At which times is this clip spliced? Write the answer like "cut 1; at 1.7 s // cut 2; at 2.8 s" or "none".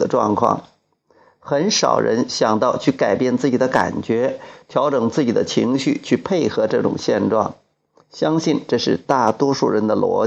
cut 1; at 8.0 s